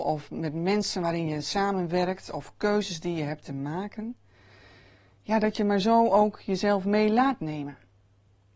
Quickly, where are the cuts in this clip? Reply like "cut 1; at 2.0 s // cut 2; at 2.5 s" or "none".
none